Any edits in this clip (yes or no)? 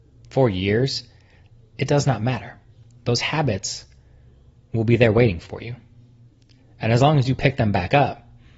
no